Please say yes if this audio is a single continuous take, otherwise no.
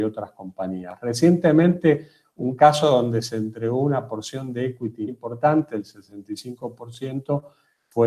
no